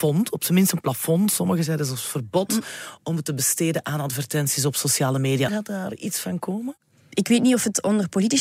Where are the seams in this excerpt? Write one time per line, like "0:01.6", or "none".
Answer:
0:05.5

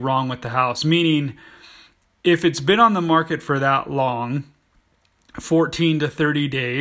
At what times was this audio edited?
none

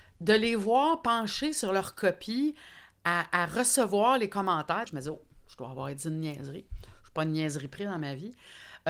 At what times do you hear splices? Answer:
0:04.9

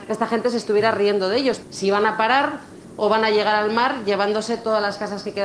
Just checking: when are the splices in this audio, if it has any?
0:01.6

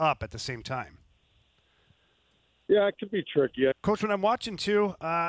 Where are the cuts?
0:03.7

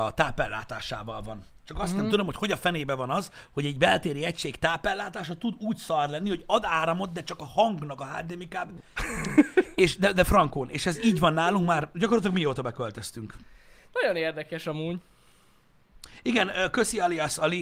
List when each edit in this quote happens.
0:09.0

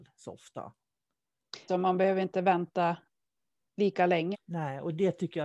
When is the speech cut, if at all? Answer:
0:01.7
0:04.3

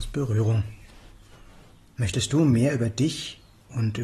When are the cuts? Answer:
none

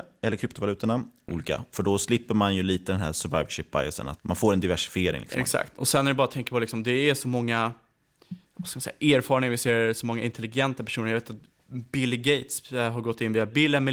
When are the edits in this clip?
0:01.3
0:04.2

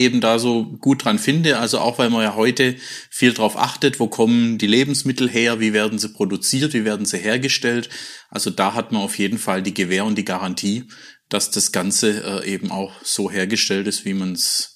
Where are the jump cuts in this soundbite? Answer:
none

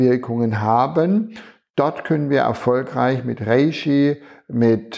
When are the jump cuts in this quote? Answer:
none

